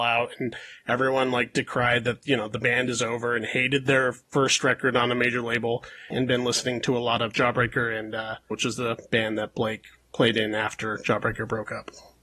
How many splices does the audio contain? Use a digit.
2